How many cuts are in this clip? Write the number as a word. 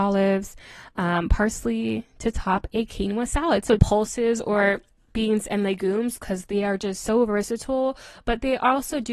one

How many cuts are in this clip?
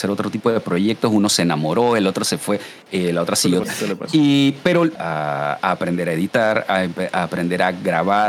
two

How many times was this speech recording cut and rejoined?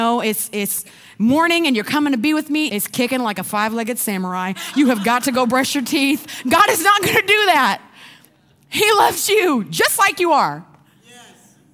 one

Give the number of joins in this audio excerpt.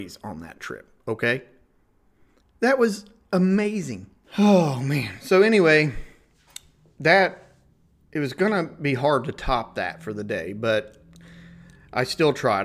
two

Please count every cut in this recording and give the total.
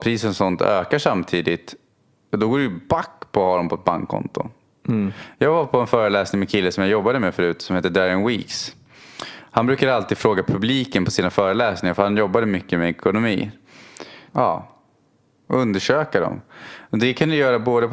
one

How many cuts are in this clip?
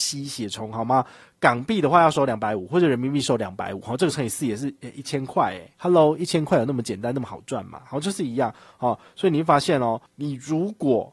two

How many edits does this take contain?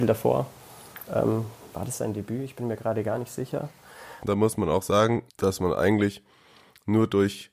two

